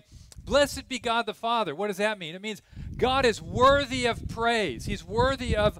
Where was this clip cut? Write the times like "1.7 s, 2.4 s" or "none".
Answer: none